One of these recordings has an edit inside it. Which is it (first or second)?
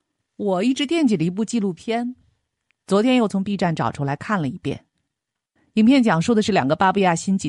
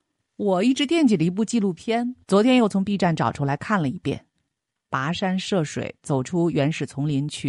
second